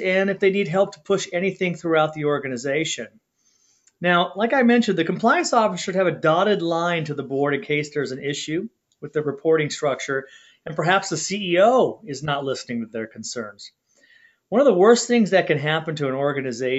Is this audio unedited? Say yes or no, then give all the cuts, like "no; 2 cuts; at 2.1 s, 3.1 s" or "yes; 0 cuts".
yes; 0 cuts